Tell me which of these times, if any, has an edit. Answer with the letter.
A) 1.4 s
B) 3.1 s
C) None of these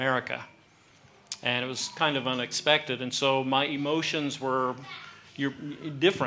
C